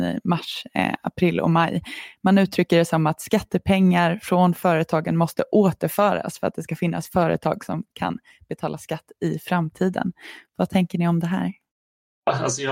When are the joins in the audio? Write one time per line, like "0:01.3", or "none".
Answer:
none